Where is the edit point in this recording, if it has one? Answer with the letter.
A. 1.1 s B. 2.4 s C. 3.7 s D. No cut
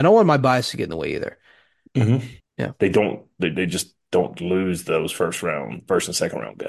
B